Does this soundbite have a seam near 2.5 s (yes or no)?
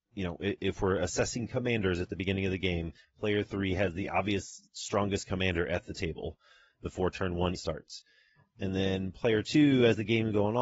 no